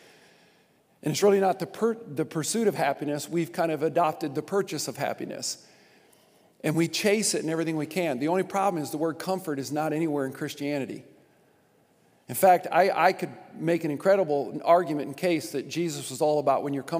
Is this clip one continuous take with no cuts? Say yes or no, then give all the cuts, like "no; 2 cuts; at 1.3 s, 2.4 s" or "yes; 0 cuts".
yes; 0 cuts